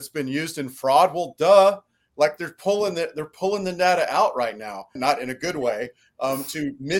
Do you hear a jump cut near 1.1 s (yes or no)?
no